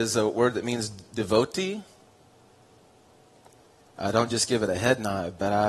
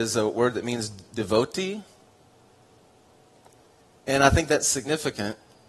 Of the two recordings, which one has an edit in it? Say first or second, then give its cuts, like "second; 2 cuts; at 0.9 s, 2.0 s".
first; 1 cut; at 3.9 s